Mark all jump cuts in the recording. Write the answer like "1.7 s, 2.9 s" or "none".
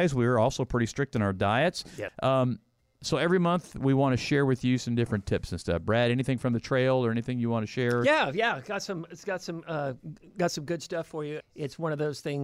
2.1 s, 11.4 s